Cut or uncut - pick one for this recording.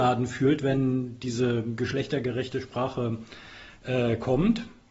uncut